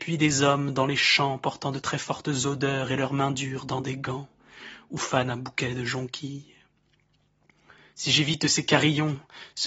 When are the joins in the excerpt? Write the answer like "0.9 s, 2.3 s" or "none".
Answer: none